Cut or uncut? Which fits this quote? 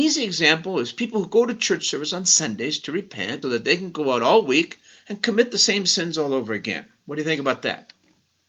cut